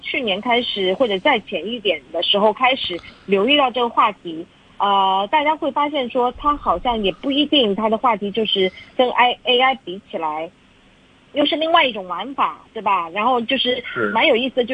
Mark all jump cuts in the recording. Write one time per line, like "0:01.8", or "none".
none